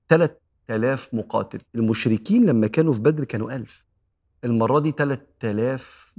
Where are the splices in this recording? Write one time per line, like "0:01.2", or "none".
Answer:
0:01.7